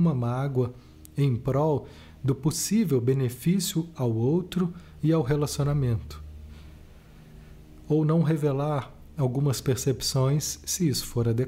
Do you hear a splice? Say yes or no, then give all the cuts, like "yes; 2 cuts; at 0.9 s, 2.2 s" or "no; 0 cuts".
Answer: no; 0 cuts